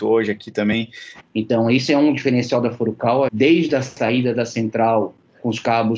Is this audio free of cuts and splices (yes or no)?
no